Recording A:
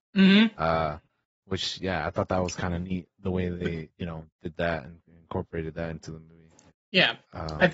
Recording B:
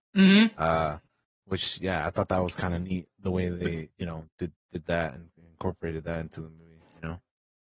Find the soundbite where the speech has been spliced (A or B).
A